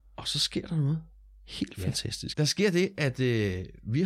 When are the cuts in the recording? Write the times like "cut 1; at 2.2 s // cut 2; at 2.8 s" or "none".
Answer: cut 1; at 2.3 s